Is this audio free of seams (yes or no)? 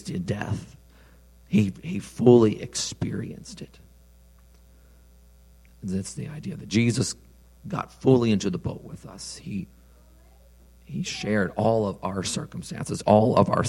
yes